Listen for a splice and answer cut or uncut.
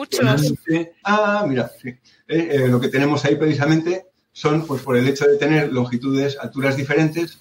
cut